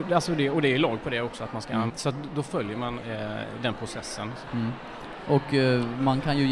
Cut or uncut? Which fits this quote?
cut